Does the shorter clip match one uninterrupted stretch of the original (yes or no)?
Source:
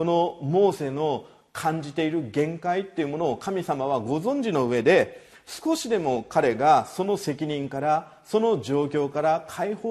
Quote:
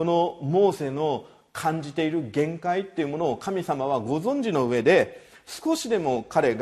yes